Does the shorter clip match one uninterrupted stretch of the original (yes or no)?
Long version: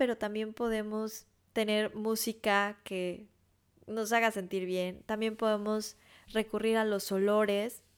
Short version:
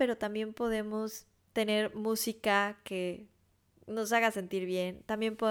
yes